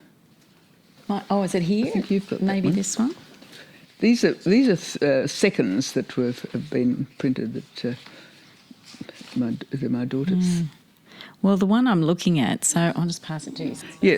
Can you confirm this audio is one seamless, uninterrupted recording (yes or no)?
yes